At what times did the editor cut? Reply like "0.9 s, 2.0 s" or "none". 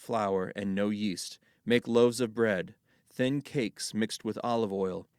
none